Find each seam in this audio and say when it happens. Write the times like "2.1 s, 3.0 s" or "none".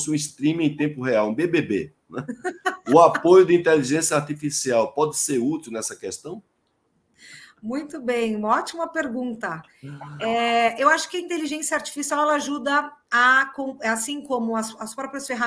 none